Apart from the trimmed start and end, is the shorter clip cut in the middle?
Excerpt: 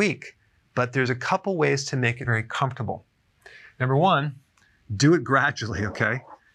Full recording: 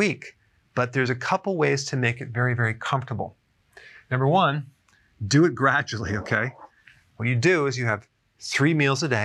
yes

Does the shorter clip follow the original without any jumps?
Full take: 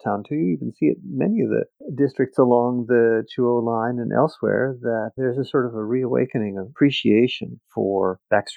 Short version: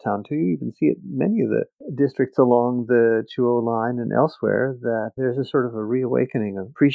yes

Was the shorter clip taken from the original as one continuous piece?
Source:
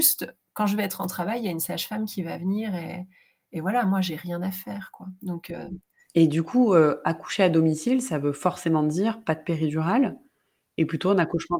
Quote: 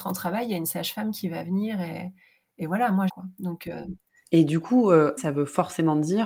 no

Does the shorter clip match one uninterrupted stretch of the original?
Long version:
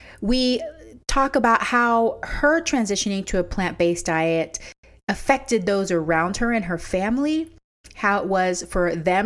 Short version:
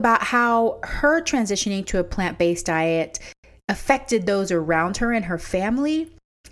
yes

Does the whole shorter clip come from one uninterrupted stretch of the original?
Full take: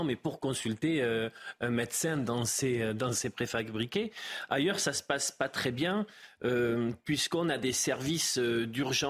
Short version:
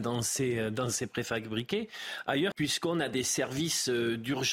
no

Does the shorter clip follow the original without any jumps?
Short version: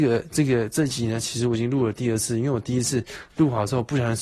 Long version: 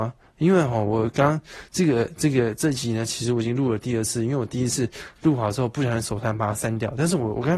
yes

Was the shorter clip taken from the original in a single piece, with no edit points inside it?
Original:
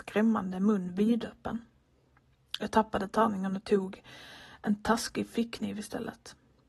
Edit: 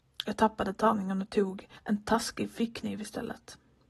no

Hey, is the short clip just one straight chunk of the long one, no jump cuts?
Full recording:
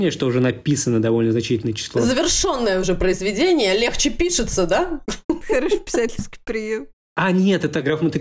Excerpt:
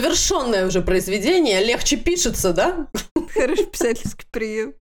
yes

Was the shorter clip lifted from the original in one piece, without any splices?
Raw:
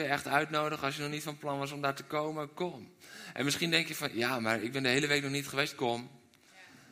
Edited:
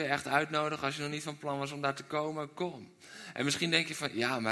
yes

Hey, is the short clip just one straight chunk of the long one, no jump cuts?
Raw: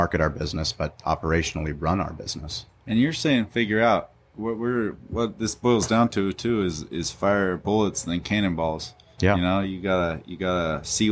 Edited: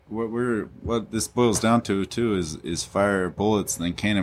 yes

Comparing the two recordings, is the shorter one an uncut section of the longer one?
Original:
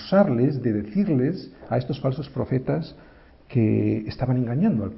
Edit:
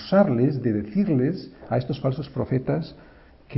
yes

